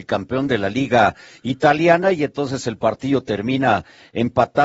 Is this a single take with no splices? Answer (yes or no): yes